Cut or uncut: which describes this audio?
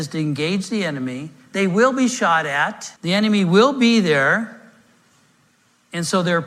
cut